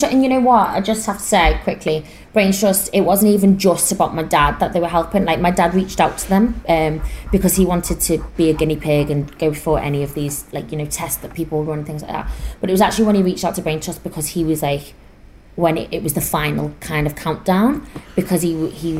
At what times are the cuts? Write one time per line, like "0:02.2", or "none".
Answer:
none